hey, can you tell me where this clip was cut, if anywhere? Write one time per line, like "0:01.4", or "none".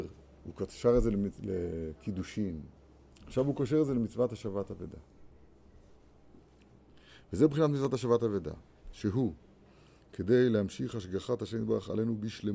0:03.1